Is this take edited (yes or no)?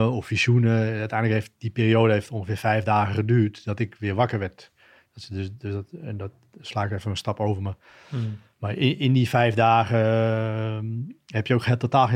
no